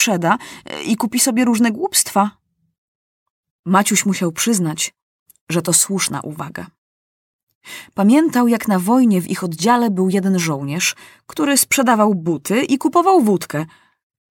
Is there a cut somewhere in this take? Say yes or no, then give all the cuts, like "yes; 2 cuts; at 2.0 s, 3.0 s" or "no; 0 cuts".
no; 0 cuts